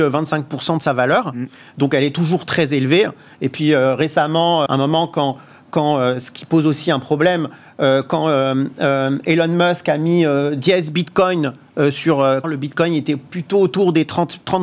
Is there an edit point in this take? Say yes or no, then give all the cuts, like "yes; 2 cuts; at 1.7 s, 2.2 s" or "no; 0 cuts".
yes; 2 cuts; at 4.7 s, 12.4 s